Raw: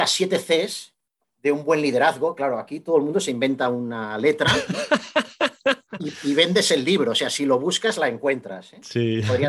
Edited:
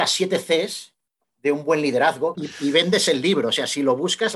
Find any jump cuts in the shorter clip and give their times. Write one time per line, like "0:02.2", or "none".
0:02.3